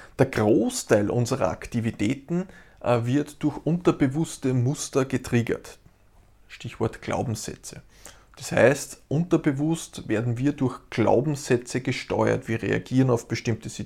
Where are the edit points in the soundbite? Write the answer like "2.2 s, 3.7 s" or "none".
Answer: 8.3 s